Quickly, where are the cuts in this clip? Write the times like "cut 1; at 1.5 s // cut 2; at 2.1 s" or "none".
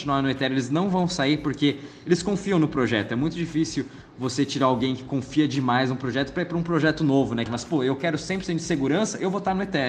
cut 1; at 7.5 s